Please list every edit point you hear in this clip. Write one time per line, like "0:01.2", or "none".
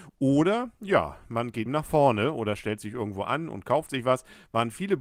0:01.7